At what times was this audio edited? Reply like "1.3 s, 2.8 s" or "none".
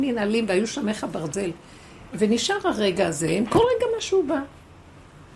2.1 s